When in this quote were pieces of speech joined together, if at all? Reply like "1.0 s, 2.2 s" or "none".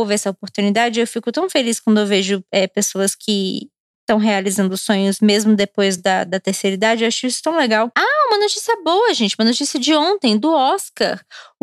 none